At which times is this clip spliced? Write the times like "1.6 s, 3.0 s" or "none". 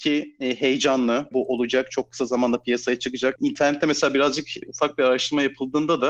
1.3 s, 3.4 s